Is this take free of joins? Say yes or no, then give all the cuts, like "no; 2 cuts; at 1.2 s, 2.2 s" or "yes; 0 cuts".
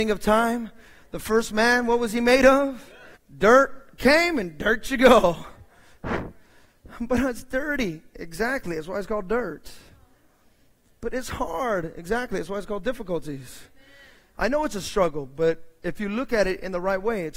no; 1 cut; at 3.2 s